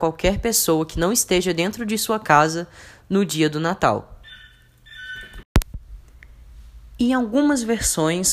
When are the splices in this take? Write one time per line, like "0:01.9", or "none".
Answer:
none